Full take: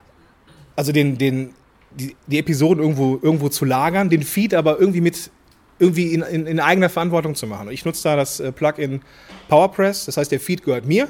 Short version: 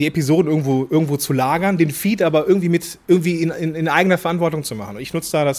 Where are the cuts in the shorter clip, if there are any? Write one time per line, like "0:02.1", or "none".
0:03.0